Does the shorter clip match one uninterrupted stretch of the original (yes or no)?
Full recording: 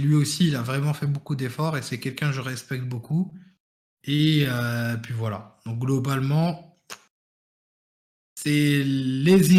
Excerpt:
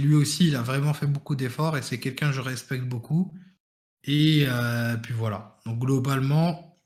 yes